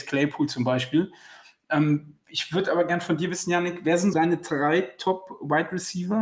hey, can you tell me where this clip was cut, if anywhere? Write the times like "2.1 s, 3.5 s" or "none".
4.1 s